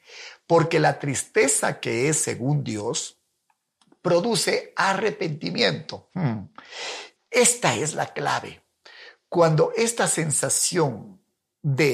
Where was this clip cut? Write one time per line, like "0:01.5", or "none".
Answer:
0:07.2